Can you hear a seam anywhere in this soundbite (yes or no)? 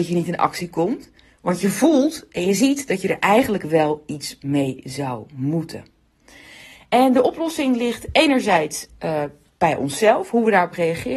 no